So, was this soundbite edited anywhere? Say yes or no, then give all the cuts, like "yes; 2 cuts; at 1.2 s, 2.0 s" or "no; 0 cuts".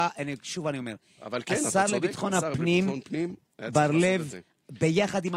no; 0 cuts